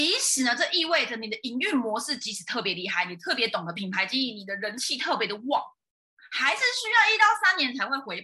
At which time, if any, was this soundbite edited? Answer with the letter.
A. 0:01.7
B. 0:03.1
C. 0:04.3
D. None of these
D